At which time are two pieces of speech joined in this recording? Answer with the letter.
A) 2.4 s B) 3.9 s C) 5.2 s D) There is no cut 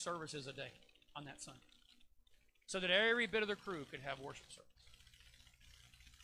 D